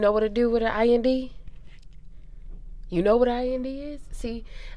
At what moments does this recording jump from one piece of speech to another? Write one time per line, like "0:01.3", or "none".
none